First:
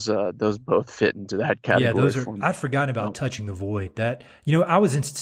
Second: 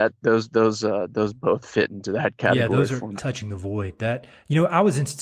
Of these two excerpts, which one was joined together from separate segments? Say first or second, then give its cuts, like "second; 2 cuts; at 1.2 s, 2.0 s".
second; 1 cut; at 3.2 s